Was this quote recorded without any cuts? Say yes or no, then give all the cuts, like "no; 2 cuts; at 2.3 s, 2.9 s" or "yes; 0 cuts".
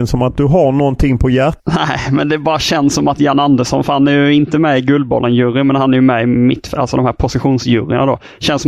yes; 0 cuts